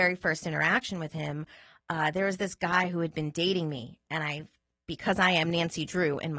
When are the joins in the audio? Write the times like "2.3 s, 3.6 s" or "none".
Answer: none